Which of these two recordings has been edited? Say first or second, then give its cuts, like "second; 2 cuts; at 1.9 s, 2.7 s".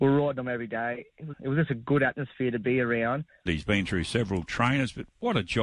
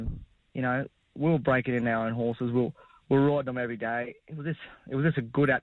first; 2 cuts; at 1.3 s, 3.5 s